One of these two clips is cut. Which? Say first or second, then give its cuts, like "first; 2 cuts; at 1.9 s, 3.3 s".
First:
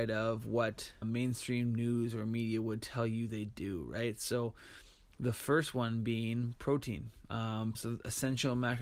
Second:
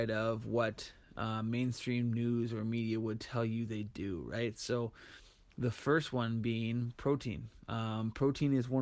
first; 2 cuts; at 1.0 s, 7.7 s